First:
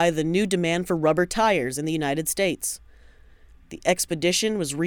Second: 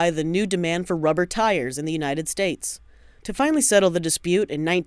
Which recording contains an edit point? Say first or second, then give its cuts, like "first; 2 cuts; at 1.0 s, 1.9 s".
second; 1 cut; at 3.2 s